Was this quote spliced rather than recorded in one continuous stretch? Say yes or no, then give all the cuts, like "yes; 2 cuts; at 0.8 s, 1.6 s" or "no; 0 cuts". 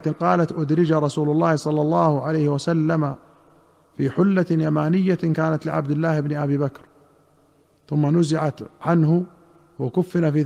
no; 0 cuts